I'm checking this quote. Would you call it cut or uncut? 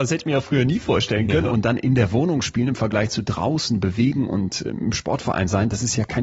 cut